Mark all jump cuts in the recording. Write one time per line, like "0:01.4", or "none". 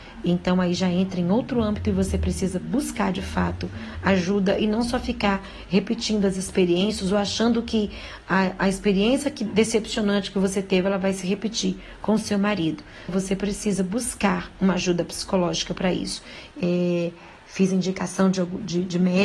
0:13.1
0:16.5

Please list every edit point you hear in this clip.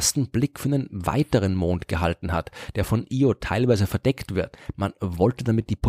0:04.7

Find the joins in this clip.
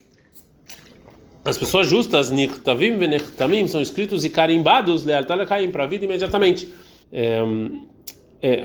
0:07.0

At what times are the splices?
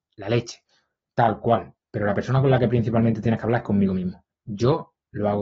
0:01.8
0:04.3

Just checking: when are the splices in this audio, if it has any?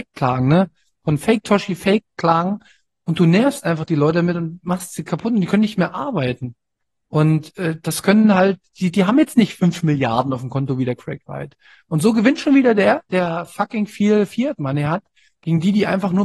none

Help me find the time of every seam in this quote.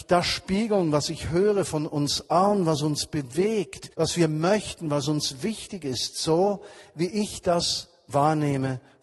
0:03.9

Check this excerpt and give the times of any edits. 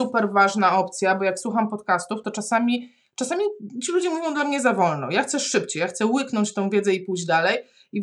none

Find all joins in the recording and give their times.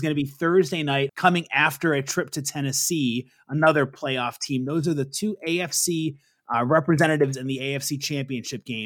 0:01.1

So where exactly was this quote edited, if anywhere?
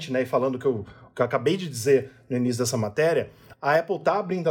none

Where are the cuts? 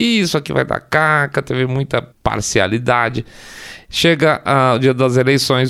0:02.1

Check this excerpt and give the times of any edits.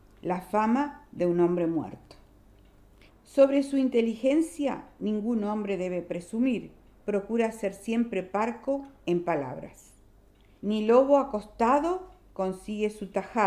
0:03.1
0:10.6

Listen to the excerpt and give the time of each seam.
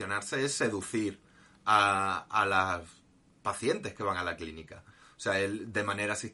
none

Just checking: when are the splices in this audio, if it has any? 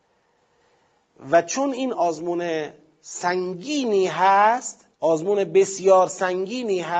0:01.9
0:04.9

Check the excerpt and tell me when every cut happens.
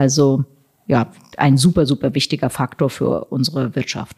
0:01.3

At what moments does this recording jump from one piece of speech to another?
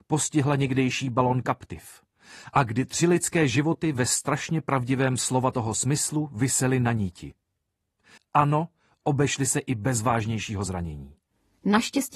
0:08.2

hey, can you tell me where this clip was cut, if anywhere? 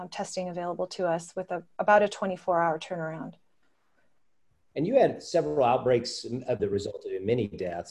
0:06.6

